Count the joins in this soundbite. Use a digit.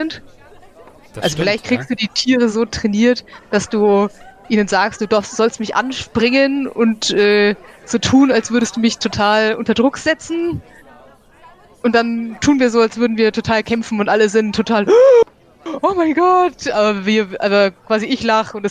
0